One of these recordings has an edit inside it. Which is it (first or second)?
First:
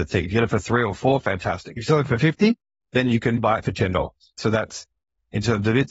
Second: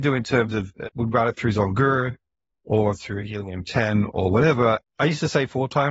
second